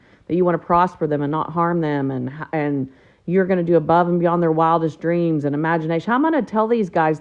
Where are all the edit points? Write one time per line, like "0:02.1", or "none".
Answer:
none